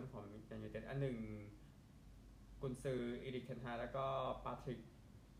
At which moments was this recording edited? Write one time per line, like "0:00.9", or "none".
none